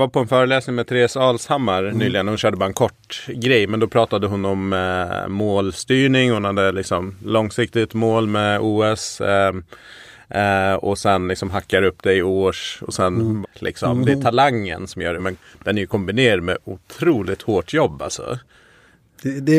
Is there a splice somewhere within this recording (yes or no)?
yes